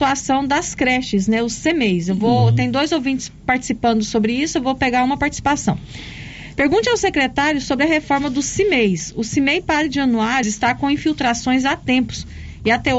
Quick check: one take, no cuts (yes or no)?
no